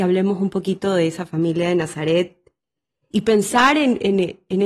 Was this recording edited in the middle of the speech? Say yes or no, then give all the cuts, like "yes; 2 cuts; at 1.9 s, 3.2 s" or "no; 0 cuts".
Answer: yes; 1 cut; at 3.1 s